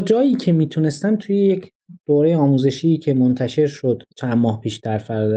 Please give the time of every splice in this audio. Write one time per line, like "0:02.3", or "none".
0:04.1